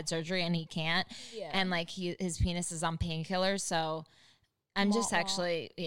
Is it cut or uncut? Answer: uncut